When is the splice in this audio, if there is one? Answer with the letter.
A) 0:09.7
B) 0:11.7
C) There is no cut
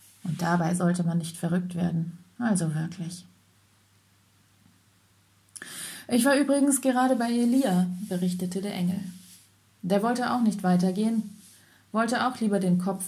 C